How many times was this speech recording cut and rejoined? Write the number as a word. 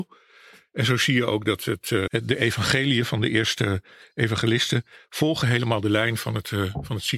one